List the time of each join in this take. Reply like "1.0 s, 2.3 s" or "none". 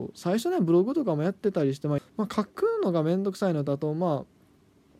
2.0 s